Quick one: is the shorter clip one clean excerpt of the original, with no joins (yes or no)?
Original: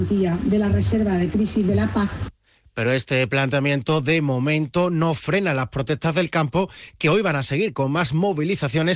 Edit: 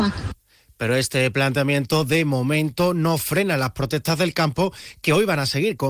yes